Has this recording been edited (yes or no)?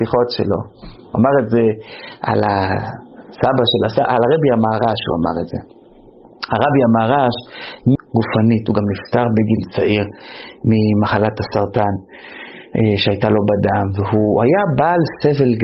yes